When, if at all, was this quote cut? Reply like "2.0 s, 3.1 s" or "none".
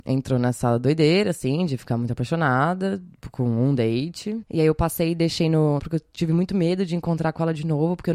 4.4 s, 5.8 s